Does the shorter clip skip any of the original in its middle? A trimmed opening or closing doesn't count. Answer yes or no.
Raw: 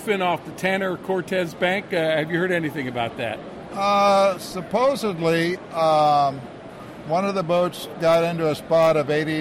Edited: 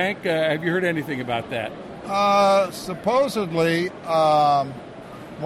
no